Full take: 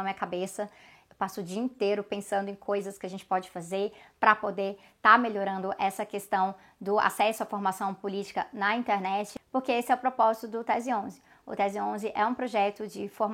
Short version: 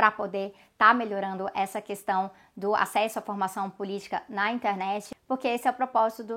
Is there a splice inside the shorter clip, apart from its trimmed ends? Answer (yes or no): no